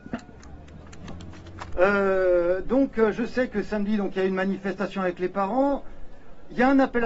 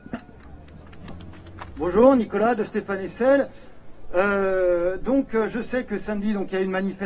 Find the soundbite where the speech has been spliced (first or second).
first